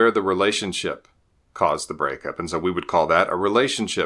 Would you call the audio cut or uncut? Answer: uncut